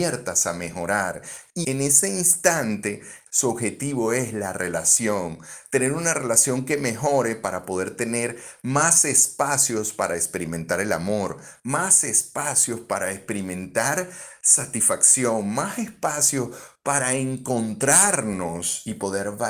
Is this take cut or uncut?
cut